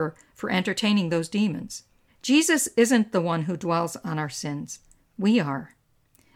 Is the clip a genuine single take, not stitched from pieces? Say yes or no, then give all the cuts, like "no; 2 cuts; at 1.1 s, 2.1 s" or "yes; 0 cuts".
no; 1 cut; at 2.1 s